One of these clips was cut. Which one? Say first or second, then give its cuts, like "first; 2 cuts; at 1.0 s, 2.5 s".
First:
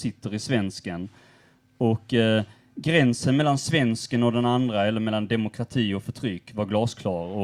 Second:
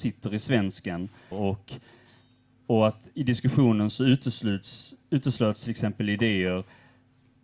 second; 1 cut; at 1.3 s